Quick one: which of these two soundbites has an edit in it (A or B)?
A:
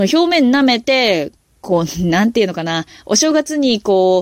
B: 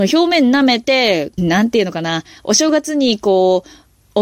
B